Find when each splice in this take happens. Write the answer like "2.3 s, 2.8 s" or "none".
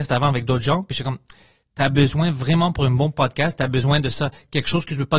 none